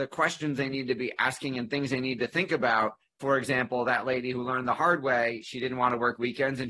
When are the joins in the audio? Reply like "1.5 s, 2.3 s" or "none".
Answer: 3.2 s

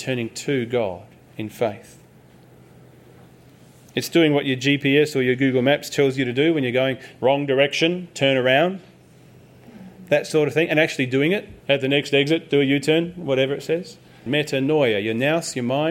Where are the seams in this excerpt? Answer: 11.6 s, 14.3 s

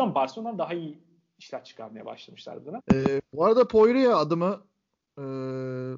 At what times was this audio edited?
2.8 s

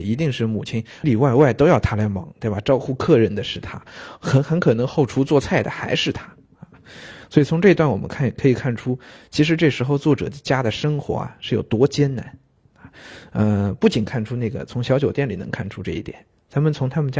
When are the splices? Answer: 1.0 s

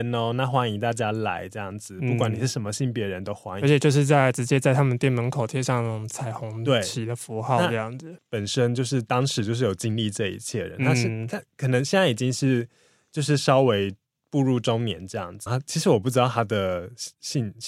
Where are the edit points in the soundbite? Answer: 8.2 s, 15.5 s

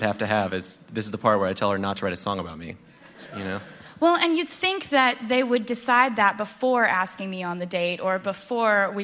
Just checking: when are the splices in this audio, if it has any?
none

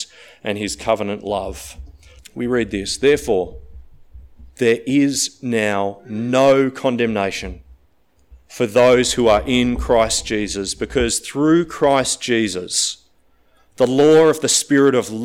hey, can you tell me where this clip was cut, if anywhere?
2.2 s

